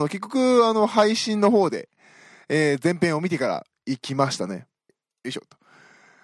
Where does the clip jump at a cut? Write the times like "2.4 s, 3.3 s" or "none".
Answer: 4.9 s